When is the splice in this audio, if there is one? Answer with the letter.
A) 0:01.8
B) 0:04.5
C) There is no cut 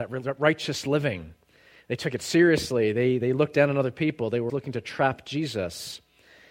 B